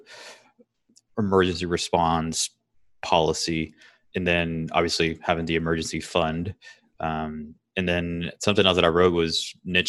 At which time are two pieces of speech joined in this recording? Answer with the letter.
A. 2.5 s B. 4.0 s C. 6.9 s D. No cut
B